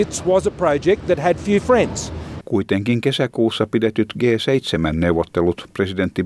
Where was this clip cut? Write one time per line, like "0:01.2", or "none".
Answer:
0:02.4

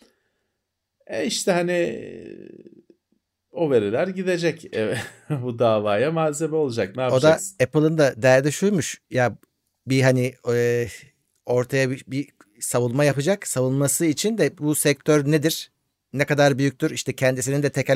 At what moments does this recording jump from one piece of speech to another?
none

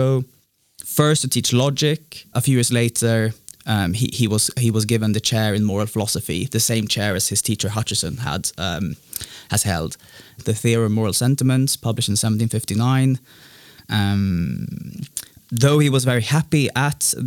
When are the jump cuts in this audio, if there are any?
0:02.3
0:10.4

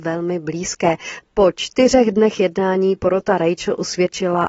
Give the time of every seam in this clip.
0:01.2

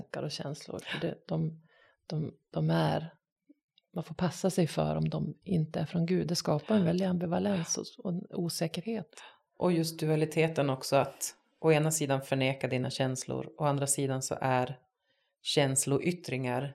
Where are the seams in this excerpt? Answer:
none

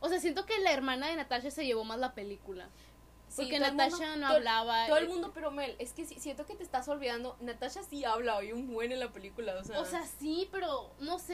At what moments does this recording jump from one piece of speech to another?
0:05.3

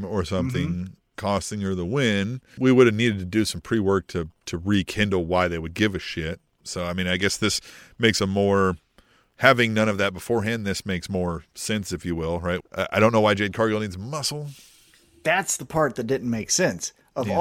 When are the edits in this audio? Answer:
0:02.6
0:12.6

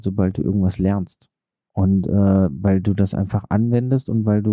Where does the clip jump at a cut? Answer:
none

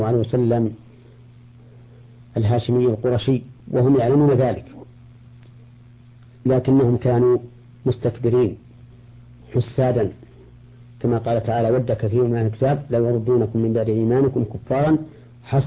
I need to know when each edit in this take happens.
0:03.6

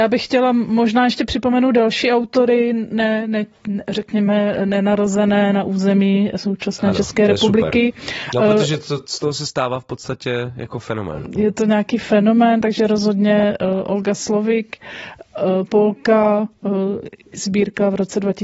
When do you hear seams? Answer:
none

